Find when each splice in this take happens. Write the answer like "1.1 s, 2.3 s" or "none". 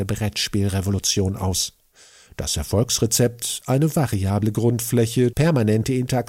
5.3 s